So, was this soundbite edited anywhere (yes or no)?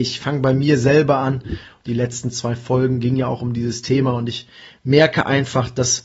no